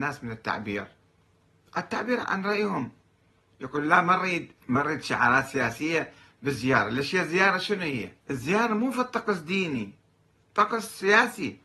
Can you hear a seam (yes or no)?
yes